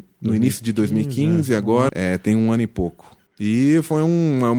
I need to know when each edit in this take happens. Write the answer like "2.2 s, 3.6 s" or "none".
1.9 s, 3.3 s